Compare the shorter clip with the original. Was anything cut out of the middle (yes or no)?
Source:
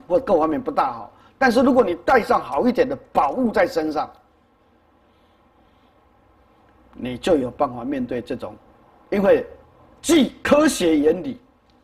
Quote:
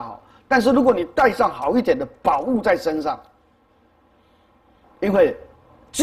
yes